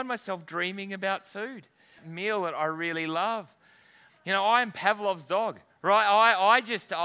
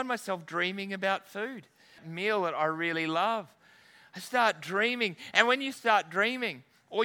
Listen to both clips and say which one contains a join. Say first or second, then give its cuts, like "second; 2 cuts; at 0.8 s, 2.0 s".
first; 1 cut; at 4.1 s